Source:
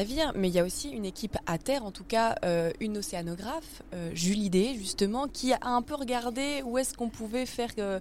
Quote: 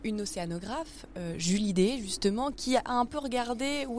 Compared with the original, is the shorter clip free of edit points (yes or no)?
yes